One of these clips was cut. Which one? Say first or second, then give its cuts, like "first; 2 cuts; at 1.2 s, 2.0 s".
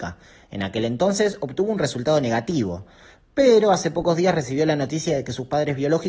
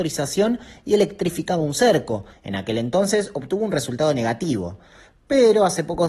second; 1 cut; at 2.3 s